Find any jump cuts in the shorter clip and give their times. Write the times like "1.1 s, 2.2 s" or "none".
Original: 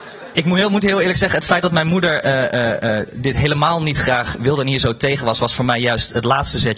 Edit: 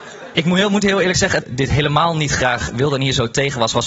1.4 s